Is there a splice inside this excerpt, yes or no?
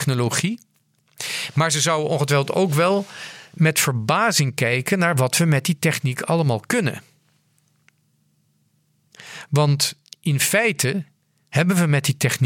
no